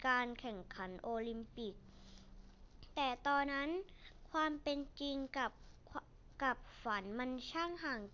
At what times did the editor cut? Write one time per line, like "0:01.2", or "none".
0:03.4